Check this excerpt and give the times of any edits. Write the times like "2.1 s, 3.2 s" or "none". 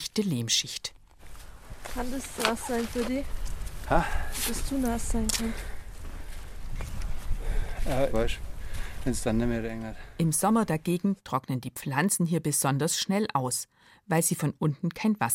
8.1 s